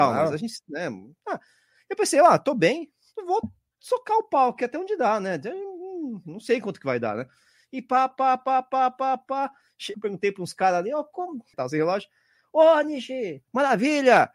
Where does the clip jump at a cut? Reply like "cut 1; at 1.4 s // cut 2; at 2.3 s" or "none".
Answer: cut 1; at 8.1 s // cut 2; at 9.9 s // cut 3; at 11.5 s